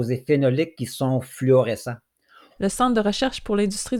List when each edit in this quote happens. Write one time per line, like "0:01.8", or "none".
0:02.6